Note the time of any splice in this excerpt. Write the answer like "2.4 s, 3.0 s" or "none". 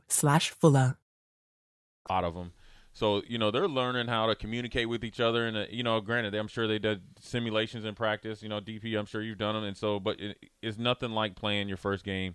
none